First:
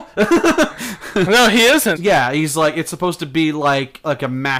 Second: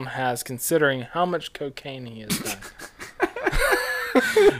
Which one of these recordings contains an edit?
first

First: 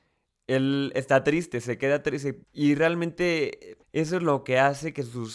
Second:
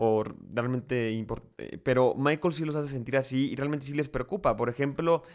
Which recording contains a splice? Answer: first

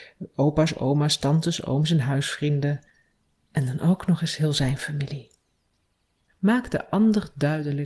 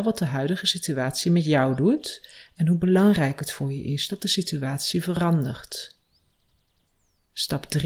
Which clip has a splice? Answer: first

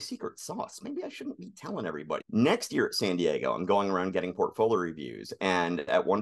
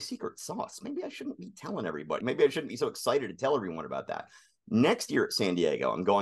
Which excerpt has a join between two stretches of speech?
first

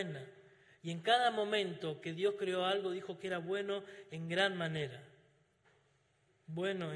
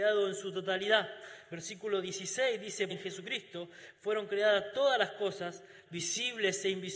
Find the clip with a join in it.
second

